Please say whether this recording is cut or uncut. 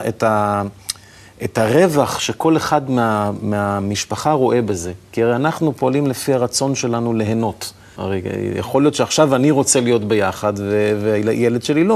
cut